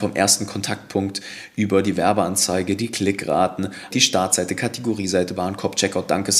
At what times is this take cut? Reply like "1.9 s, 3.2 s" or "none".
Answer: 3.9 s, 5.3 s